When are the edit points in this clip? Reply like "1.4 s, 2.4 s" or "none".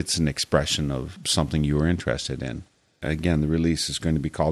3.0 s